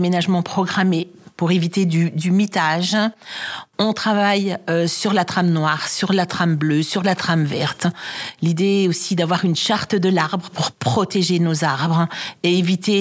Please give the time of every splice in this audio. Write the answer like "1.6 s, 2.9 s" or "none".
none